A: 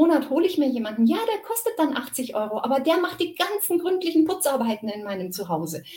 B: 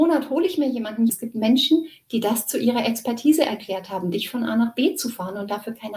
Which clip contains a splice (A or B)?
B